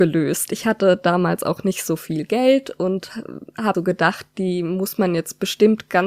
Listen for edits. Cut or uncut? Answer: cut